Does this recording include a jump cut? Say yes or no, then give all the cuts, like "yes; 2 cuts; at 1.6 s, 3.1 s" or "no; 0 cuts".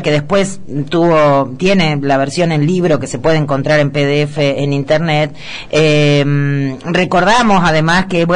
no; 0 cuts